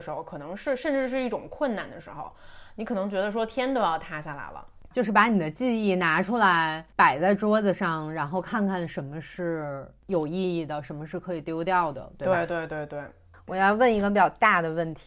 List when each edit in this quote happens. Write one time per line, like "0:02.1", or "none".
0:04.9
0:12.7

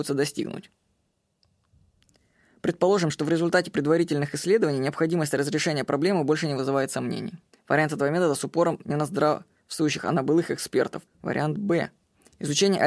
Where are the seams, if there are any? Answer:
0:07.5
0:11.1

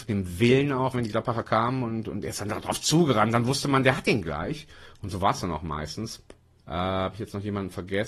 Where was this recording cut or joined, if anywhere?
0:00.9
0:06.6

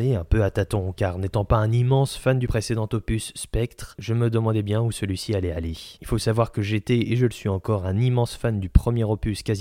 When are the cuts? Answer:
none

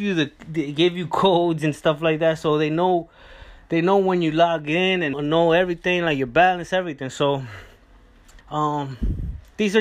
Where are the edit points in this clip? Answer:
0:05.1
0:08.4

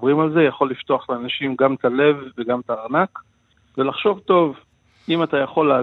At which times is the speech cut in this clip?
none

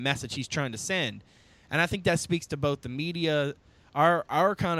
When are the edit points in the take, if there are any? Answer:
none

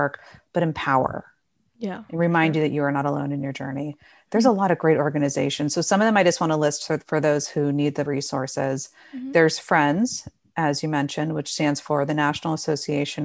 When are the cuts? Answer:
none

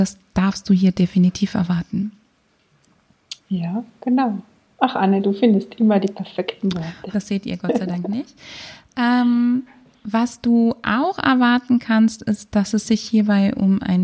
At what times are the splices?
0:07.1

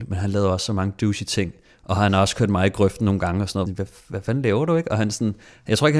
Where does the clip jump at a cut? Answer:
0:03.7

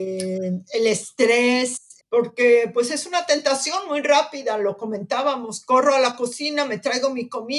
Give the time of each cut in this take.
0:02.0

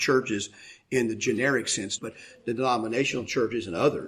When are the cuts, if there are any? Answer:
0:02.0

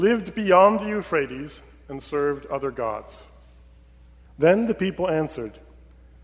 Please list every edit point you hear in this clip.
0:04.2

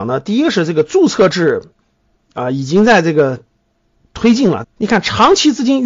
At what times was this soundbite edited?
0:04.6

